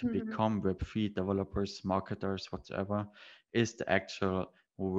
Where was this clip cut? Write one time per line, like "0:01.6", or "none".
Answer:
none